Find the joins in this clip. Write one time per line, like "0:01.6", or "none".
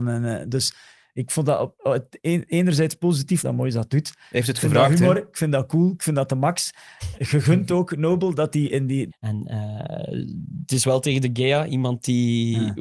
0:03.4
0:09.1